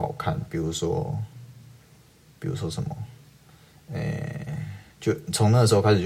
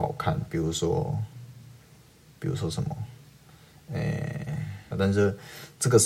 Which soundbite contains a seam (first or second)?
second